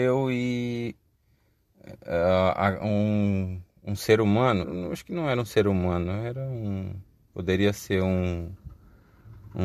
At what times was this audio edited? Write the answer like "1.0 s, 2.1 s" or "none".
4.6 s